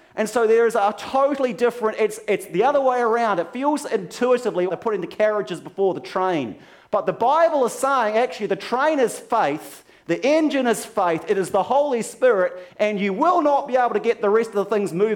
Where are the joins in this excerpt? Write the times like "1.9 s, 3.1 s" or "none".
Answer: 4.7 s